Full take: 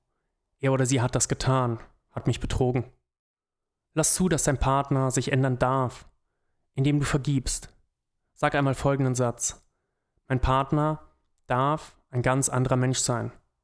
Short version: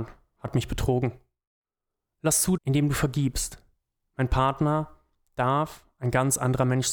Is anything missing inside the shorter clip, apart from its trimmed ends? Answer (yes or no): yes